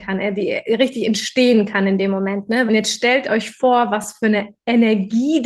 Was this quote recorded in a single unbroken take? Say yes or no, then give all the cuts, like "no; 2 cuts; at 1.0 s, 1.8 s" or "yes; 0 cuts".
no; 1 cut; at 2.7 s